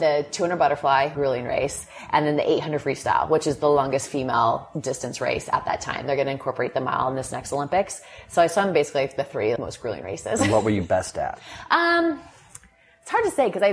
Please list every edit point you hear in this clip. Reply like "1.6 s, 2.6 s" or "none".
1.1 s, 9.6 s